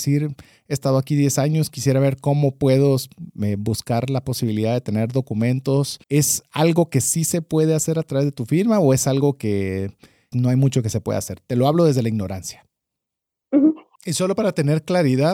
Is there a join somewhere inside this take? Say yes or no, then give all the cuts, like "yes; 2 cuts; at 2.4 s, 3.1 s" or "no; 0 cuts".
yes; 3 cuts; at 6.0 s, 10.3 s, 14.0 s